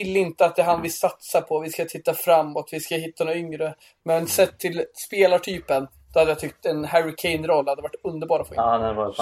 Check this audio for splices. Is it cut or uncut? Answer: uncut